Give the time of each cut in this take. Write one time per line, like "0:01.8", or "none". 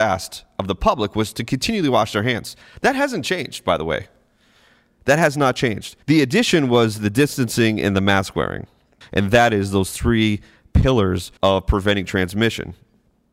0:06.0
0:09.0
0:11.4